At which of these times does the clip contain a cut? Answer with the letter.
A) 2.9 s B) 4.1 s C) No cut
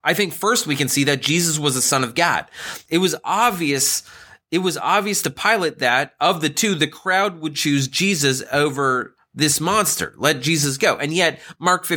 A